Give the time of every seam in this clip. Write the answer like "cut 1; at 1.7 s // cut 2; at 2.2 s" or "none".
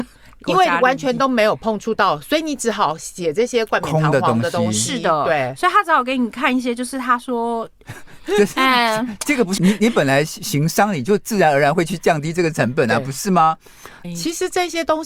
cut 1; at 7.8 s // cut 2; at 9.6 s // cut 3; at 14.0 s